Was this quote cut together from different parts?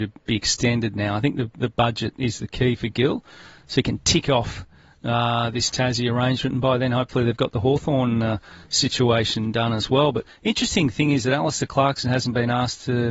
no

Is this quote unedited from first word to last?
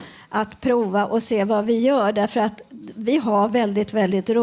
yes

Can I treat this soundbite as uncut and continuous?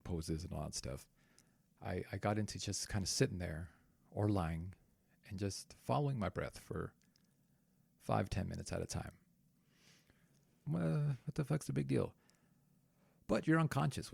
no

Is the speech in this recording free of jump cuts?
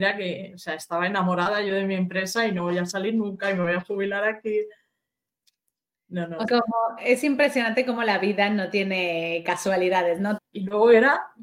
no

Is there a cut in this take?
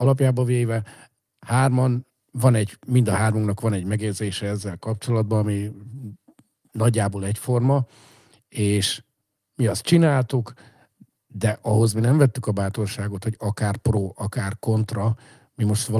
no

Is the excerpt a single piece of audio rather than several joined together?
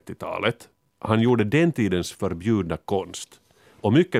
no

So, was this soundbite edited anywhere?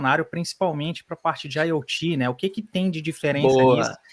no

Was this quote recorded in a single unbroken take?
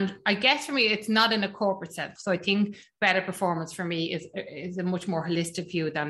no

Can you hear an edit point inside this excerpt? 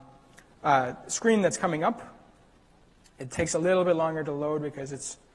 no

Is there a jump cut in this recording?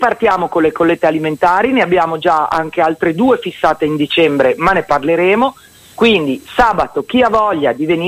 no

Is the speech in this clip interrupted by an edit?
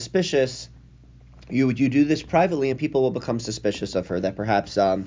no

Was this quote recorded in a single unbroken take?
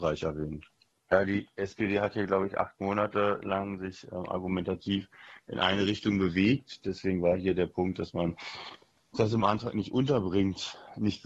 no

